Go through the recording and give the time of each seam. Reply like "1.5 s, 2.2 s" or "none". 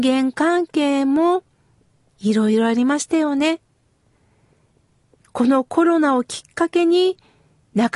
none